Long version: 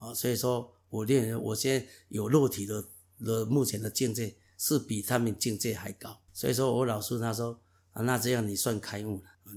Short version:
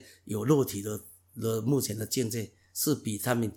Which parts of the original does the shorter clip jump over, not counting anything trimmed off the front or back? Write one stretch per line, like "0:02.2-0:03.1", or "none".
none